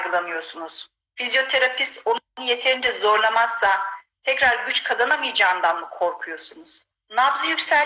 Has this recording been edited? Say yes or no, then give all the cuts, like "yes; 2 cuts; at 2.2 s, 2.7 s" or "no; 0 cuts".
yes; 1 cut; at 6.9 s